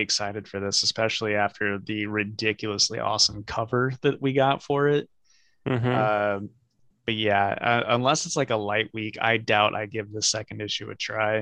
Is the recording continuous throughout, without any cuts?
yes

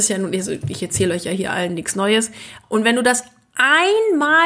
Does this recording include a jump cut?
yes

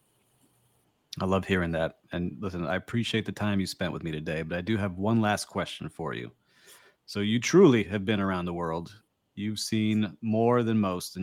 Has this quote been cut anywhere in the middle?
no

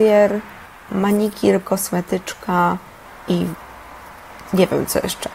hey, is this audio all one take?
no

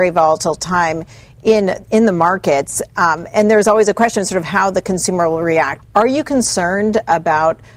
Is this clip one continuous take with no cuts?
no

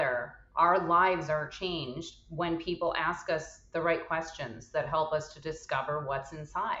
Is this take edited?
no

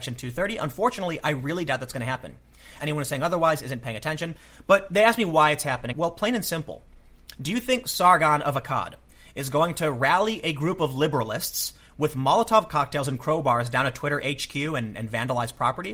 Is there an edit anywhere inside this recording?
yes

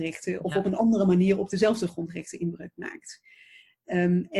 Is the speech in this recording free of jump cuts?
yes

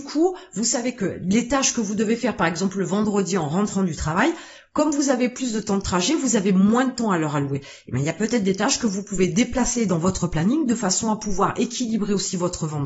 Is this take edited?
no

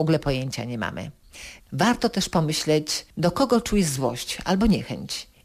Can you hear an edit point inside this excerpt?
yes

